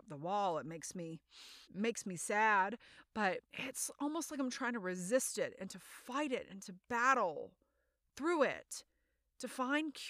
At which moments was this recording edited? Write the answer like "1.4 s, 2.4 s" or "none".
1.6 s, 3.4 s